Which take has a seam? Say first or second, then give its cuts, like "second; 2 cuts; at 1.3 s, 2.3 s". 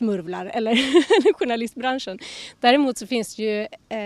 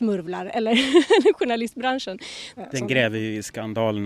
second; 1 cut; at 2.6 s